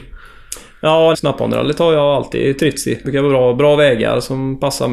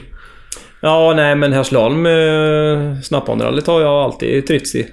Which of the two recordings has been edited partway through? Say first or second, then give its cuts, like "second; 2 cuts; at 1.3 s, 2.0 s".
first; 2 cuts; at 1.1 s, 3.0 s